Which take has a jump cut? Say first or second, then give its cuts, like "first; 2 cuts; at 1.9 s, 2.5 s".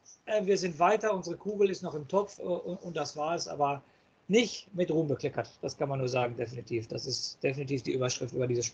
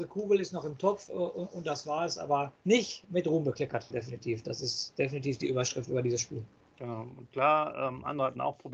second; 2 cuts; at 2.6 s, 3.9 s